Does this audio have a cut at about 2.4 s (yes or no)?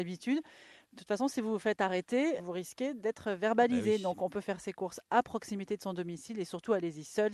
yes